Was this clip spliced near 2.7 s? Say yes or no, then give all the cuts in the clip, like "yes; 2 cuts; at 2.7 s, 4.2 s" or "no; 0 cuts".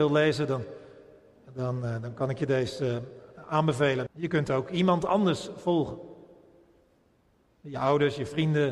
no; 1 cut; at 4.1 s